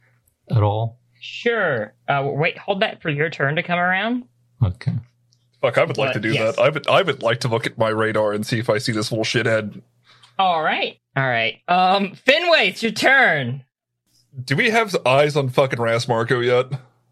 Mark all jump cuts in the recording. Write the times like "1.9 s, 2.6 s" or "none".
11.0 s